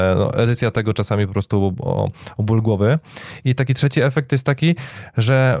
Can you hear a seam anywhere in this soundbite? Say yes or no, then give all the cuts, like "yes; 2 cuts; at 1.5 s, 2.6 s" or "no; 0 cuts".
no; 0 cuts